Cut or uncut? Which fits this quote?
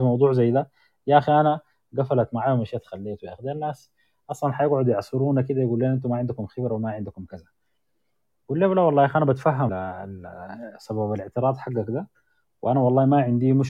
cut